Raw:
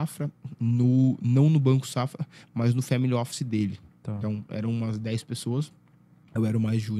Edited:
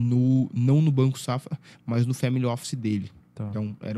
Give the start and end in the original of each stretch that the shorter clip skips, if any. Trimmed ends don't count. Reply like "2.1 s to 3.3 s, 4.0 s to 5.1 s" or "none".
none